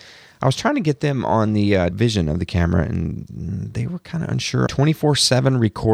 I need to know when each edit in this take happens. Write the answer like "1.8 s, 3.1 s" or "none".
1.9 s, 4.7 s